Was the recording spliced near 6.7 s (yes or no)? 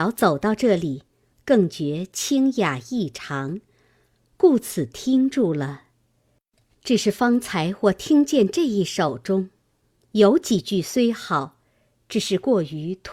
no